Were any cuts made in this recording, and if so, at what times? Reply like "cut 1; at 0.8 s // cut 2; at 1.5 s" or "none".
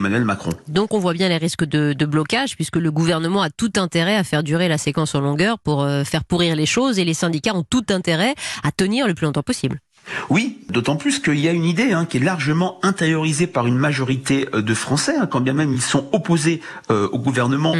none